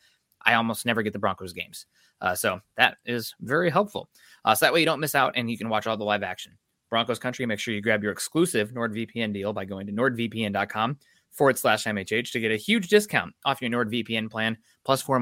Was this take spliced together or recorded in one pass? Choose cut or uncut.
uncut